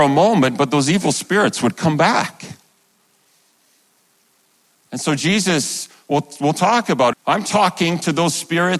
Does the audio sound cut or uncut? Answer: cut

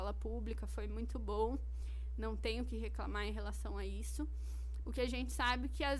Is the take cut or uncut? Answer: cut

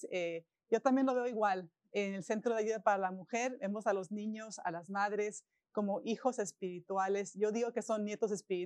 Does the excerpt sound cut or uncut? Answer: uncut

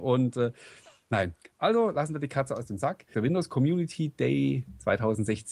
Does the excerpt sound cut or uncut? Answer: cut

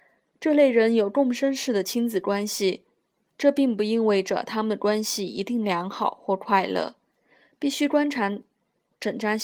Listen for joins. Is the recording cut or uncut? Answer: uncut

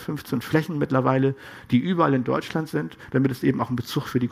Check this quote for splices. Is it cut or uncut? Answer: cut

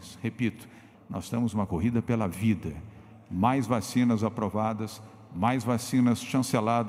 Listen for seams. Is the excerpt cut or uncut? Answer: cut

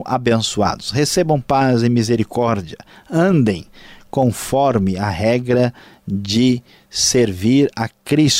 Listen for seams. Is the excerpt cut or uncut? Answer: uncut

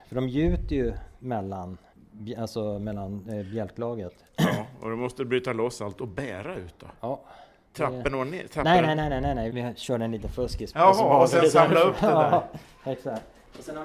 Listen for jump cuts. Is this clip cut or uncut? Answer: cut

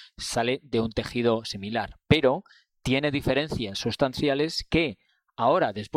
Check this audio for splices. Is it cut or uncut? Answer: uncut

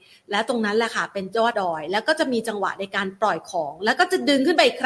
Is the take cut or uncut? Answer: cut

